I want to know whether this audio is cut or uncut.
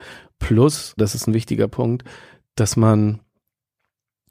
cut